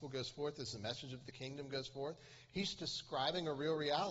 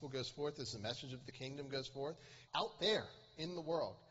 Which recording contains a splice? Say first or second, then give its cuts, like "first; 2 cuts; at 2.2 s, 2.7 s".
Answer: second; 1 cut; at 2.5 s